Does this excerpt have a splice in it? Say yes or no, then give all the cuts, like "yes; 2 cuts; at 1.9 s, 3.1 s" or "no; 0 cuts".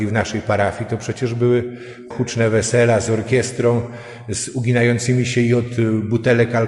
yes; 1 cut; at 2.1 s